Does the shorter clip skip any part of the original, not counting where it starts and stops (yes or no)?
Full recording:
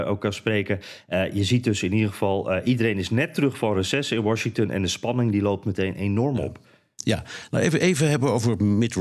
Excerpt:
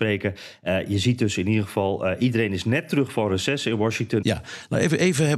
yes